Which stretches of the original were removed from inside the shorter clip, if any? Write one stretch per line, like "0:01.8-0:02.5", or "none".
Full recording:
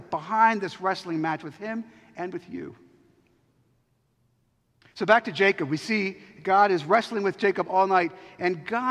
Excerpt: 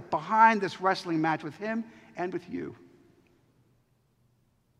none